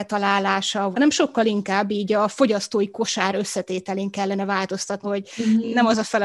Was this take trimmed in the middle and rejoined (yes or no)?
yes